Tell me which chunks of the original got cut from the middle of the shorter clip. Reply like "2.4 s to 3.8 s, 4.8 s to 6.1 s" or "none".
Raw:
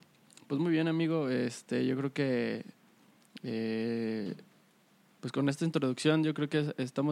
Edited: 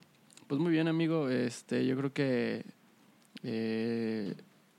none